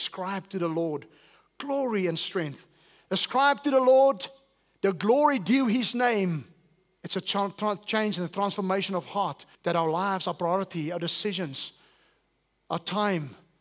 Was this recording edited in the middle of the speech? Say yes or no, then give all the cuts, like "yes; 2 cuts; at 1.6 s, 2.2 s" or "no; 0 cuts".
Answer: yes; 2 cuts; at 7.0 s, 9.6 s